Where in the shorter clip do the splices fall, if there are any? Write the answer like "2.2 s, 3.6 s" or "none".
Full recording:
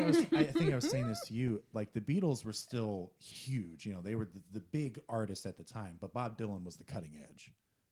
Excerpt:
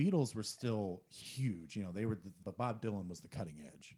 2.4 s